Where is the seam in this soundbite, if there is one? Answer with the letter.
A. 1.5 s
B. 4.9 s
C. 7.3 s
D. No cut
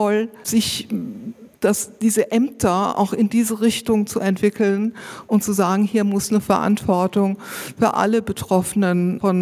A